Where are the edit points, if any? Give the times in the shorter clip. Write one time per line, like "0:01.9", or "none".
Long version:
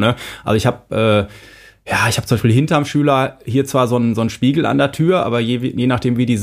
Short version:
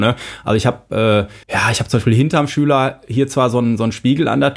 0:01.4

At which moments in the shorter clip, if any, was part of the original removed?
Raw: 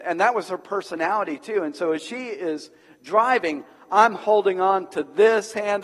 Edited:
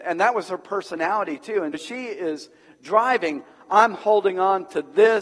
0:01.7

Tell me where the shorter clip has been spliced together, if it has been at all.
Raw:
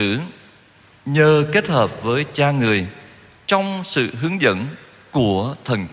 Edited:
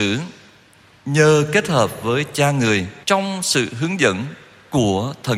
0:03.0

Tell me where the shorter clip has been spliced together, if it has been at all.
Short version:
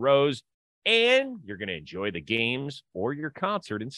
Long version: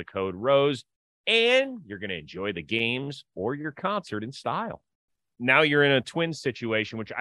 none

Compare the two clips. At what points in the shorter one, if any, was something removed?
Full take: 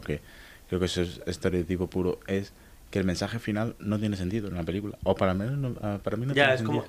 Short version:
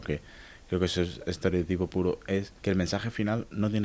0:02.6

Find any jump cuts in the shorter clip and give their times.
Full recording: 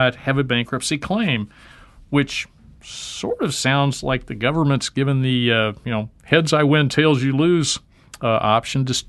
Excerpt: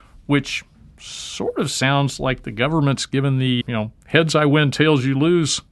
0:03.6

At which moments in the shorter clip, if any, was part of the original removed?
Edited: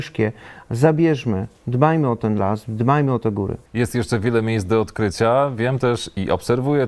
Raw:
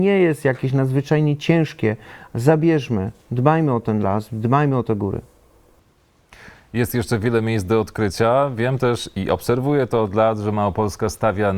0:03.7

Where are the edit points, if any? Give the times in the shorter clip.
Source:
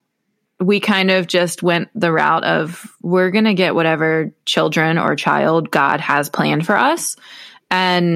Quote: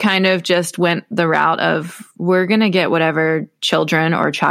none

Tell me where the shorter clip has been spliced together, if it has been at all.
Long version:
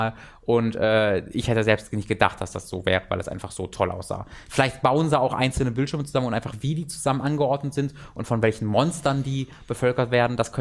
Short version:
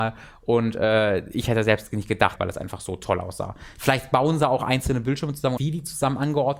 0:02.4
0:05.6

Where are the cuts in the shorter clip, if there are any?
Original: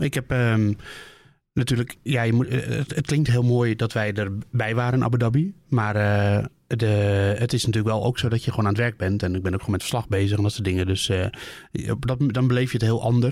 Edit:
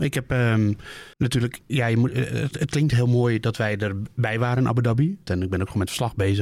0:01.1
0:05.3

